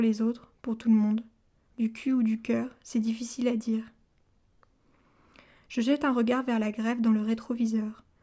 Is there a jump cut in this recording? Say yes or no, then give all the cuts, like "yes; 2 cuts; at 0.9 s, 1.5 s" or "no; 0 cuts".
yes; 1 cut; at 1.7 s